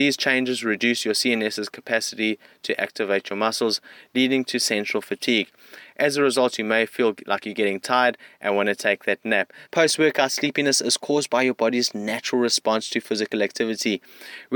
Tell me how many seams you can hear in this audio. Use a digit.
1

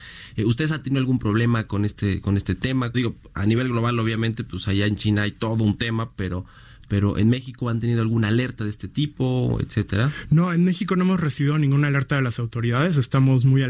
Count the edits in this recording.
1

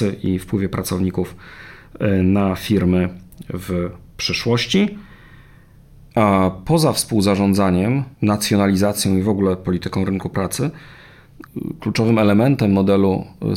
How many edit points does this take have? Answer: 2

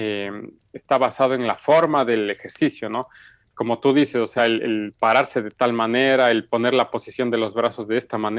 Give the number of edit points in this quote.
0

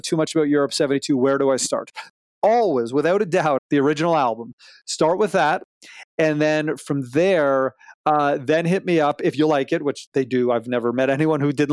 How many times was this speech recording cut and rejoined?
1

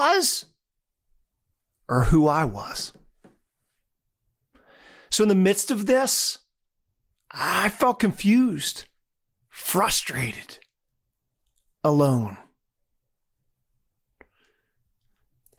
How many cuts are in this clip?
0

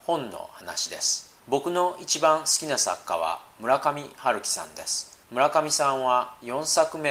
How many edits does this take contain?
2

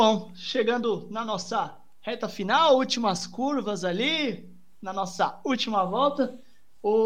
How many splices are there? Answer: 0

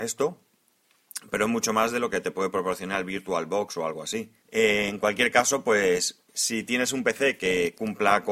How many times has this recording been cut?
2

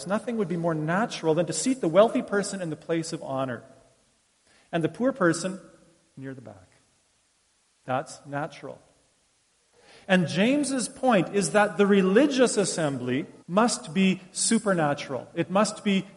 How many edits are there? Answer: 1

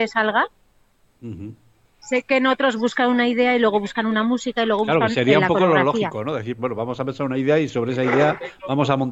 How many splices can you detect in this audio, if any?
2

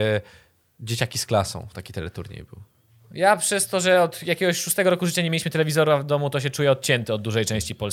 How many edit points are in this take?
0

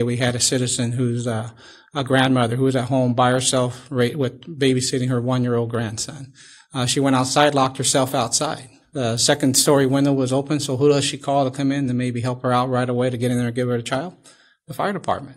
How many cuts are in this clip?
0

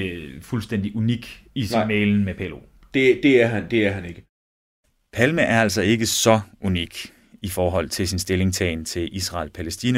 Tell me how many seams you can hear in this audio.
1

